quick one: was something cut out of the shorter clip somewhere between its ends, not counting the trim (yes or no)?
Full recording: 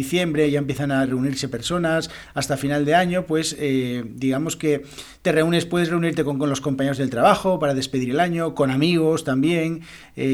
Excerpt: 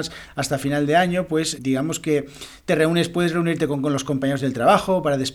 yes